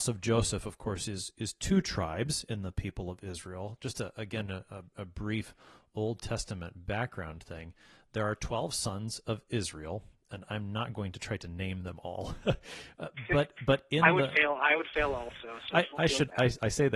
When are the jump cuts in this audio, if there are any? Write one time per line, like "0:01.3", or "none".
none

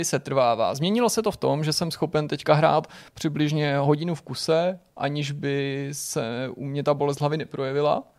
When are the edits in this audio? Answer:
none

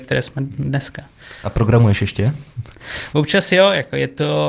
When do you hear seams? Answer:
none

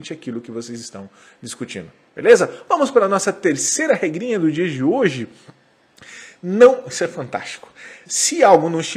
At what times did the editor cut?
0:08.1

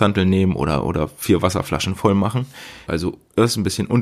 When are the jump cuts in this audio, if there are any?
0:02.9

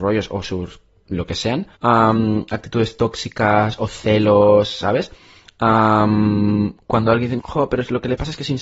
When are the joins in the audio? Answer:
0:01.7
0:07.4

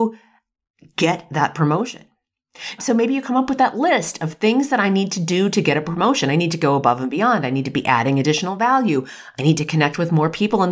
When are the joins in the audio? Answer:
0:02.8

